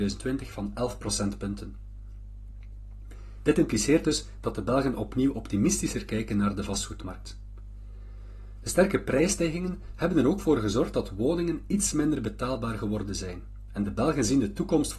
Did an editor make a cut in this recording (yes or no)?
no